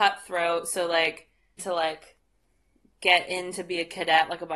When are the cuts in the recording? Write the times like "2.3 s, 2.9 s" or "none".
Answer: 1.6 s